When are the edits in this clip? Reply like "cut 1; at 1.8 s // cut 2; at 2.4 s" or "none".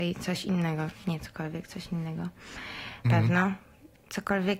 cut 1; at 3.0 s

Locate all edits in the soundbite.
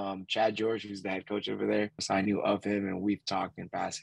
cut 1; at 2.0 s

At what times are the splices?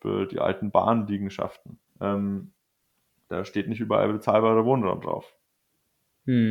cut 1; at 1.9 s

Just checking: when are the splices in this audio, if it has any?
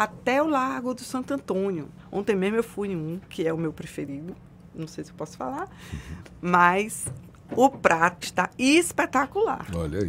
cut 1; at 2.0 s // cut 2; at 8.2 s

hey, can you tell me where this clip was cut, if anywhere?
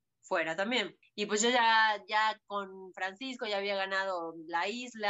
cut 1; at 1.0 s

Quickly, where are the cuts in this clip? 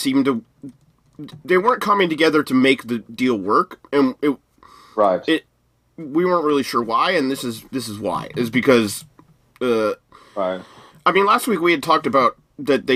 cut 1; at 10.9 s

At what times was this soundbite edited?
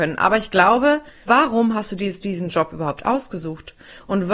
cut 1; at 1.3 s

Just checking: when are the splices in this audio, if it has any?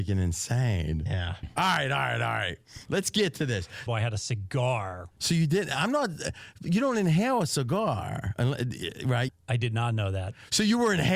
cut 1; at 3.9 s // cut 2; at 5.1 s // cut 3; at 9.3 s

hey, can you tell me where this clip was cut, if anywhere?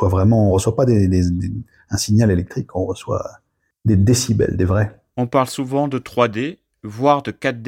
none

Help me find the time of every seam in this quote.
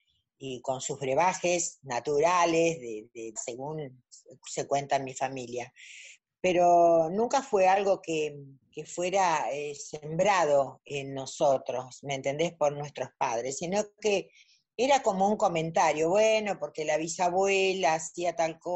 cut 1; at 3.4 s

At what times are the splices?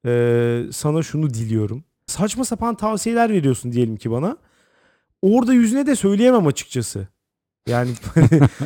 cut 1; at 2.1 s

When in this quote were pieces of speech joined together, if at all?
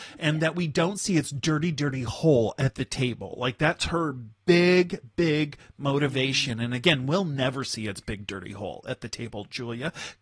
none

